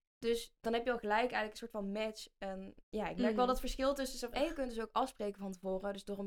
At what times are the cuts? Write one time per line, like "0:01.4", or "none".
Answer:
0:02.8
0:04.3